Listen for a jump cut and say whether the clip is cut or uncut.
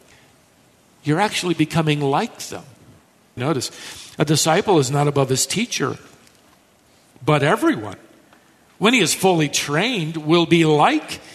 cut